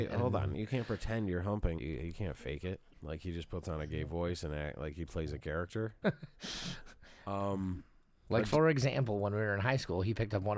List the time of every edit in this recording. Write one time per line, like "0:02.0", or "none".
0:01.8
0:02.9
0:06.0